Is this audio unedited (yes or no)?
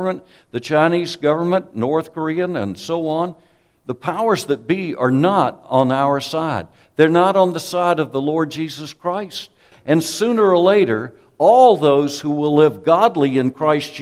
no